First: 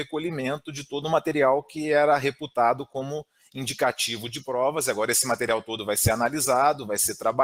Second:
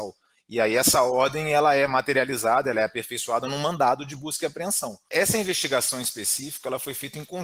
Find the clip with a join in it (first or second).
second